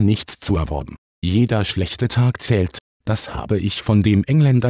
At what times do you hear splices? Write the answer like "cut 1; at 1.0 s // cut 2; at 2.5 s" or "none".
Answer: cut 1; at 1.1 s